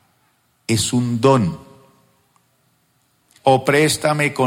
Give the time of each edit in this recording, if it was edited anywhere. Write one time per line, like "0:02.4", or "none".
0:03.4